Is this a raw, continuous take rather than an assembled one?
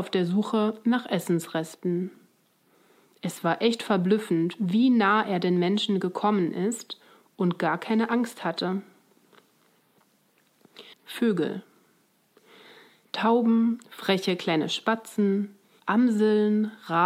no; 2 cuts; at 10.9 s, 15.8 s

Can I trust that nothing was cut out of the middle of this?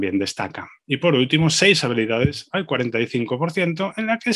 yes; 0 cuts

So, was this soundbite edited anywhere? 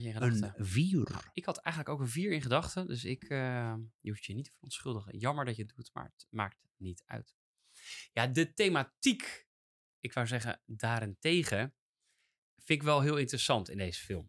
no; 0 cuts

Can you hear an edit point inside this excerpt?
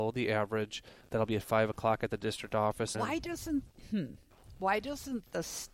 yes; 2 cuts; at 1.0 s, 2.9 s

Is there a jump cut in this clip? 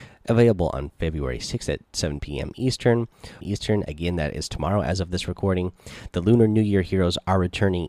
yes; 1 cut; at 3.4 s

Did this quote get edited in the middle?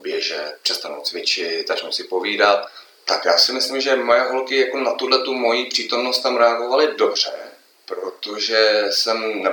yes; 1 cut; at 2.9 s

